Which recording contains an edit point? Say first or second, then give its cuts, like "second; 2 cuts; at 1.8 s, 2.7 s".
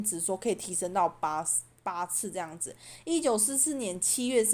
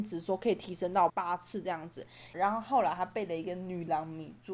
second; 2 cuts; at 1.1 s, 2.3 s